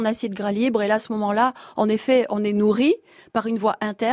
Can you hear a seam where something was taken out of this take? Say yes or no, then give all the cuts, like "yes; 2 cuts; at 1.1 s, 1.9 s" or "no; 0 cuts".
no; 0 cuts